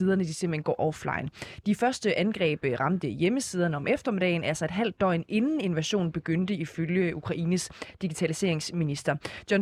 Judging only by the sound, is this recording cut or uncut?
uncut